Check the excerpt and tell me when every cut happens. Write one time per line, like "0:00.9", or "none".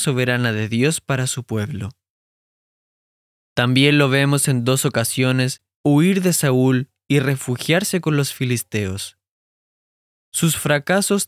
0:03.4
0:05.7